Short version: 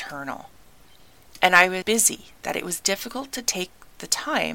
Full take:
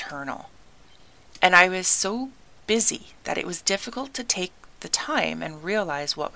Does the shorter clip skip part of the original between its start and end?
yes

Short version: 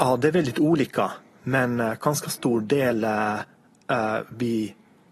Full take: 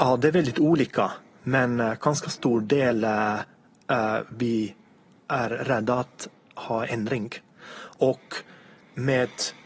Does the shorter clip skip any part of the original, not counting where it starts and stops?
no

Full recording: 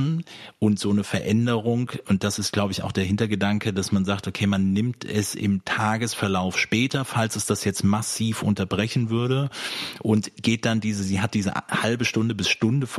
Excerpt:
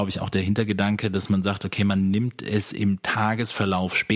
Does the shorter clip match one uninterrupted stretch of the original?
yes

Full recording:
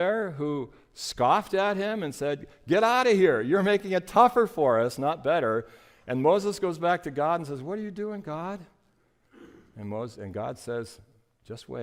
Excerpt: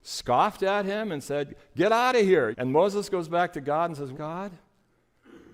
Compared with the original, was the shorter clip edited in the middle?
yes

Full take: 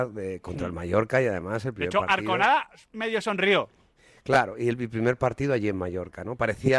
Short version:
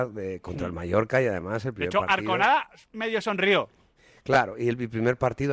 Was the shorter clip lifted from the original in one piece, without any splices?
yes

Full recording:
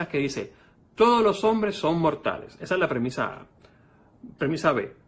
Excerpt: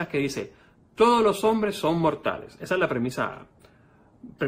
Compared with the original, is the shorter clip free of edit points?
yes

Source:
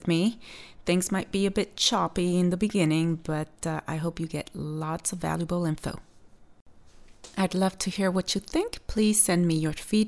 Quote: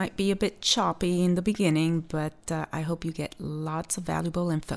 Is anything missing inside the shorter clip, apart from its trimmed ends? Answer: no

